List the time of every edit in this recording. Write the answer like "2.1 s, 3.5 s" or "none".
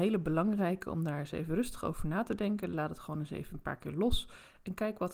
2.7 s